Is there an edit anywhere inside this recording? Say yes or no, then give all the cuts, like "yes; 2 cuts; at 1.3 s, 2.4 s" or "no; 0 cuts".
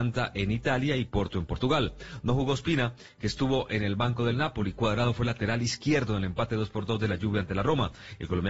no; 0 cuts